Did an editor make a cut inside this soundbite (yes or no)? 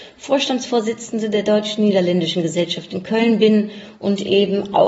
yes